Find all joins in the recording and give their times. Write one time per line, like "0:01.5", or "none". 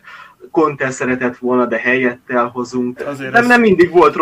0:03.0